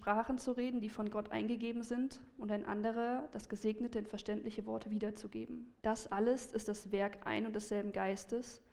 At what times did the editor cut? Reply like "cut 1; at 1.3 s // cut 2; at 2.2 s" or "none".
cut 1; at 5.8 s